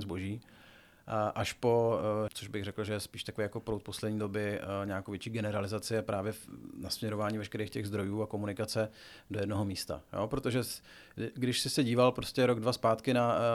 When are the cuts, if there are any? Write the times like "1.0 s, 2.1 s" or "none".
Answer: 2.3 s